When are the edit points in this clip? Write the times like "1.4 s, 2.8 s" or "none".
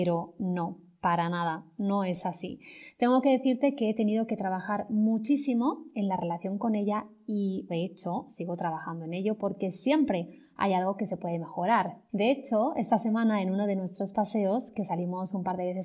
7.7 s, 12.1 s